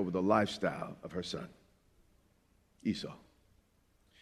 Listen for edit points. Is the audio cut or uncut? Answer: uncut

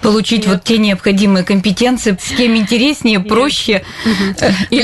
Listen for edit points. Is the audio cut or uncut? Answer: cut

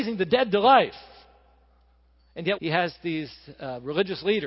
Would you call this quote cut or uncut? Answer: cut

